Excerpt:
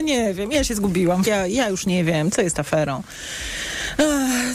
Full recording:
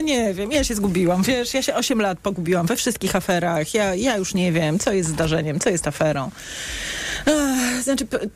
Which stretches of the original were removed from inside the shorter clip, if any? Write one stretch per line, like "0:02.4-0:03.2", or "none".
0:01.2-0:03.7
0:04.8-0:05.6